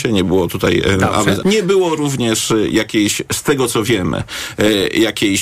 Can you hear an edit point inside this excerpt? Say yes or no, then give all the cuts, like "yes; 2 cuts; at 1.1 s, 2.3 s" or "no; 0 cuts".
yes; 1 cut; at 1.4 s